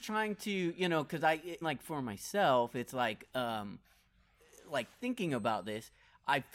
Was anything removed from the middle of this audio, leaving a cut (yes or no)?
yes